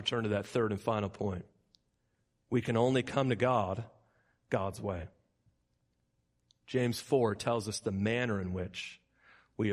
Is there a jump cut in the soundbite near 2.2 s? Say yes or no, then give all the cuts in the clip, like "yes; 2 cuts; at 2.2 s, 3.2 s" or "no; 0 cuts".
no; 0 cuts